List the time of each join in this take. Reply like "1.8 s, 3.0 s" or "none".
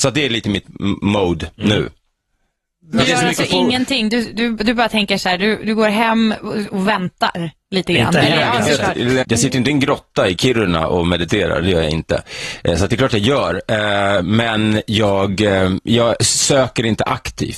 9.2 s